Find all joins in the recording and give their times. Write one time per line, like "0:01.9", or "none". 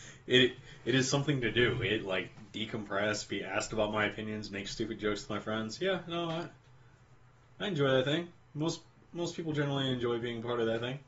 none